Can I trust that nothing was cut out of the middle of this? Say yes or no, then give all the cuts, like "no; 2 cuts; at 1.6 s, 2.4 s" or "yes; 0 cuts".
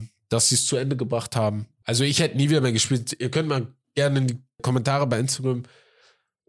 no; 2 cuts; at 1.8 s, 4.6 s